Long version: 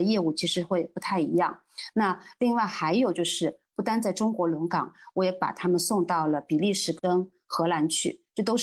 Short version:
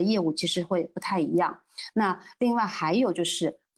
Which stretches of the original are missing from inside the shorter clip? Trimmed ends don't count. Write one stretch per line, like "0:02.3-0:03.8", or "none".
none